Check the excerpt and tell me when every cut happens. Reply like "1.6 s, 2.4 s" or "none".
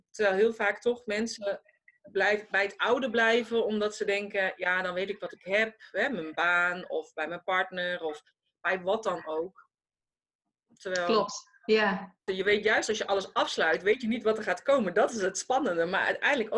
12.3 s